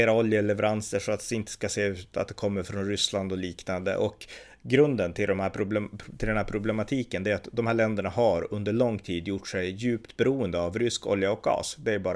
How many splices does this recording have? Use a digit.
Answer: 0